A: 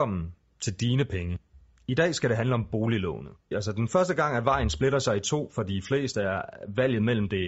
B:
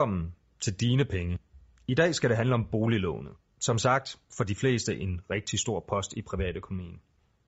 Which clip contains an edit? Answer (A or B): A